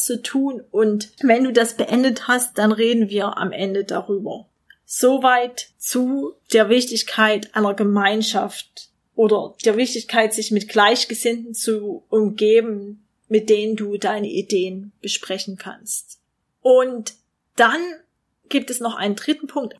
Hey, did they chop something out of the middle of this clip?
no; 0 cuts

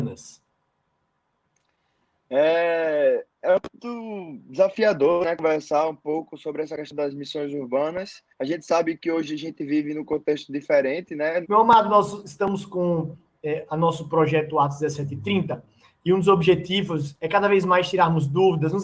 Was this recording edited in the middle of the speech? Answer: yes; 2 cuts; at 8.3 s, 11.4 s

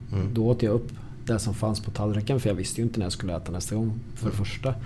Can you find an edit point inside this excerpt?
no; 0 cuts

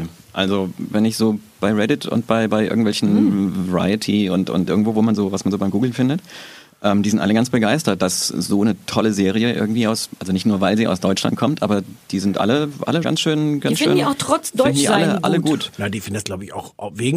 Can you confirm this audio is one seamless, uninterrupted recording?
no; 1 cut; at 13.0 s

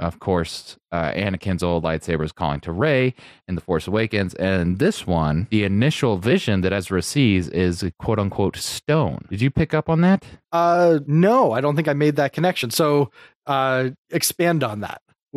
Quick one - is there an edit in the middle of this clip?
yes; 1 cut; at 10.4 s

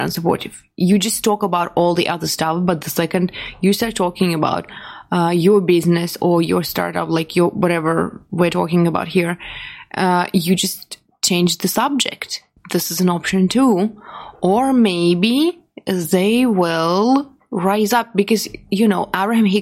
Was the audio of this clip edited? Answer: no; 0 cuts

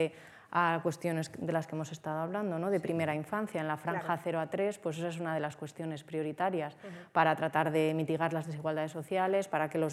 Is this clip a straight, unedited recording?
yes; 0 cuts

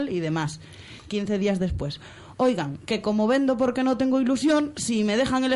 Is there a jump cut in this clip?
no; 0 cuts

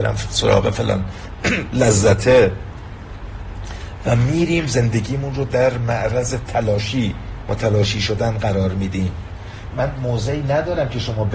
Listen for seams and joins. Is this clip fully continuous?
no; 1 cut; at 9.7 s

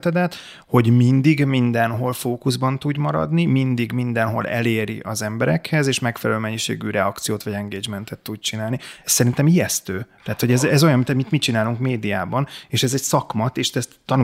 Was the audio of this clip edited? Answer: no; 0 cuts

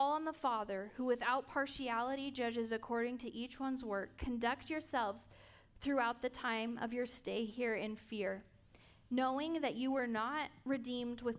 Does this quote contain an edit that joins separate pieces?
no; 0 cuts

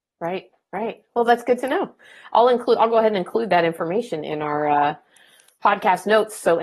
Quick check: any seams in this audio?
no; 0 cuts

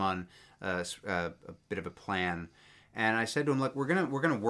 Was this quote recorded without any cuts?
yes; 0 cuts

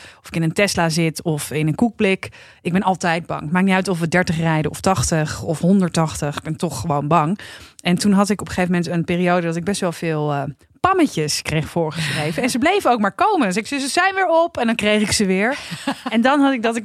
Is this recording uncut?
yes; 0 cuts

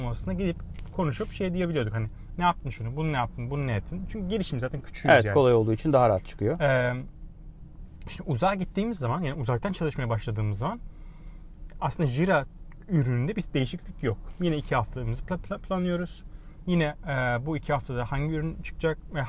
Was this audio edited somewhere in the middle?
no; 0 cuts

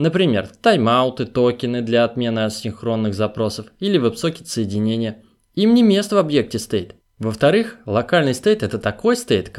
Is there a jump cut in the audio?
yes; 1 cut; at 7.0 s

